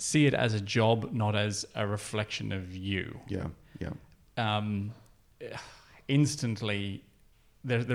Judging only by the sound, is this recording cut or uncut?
cut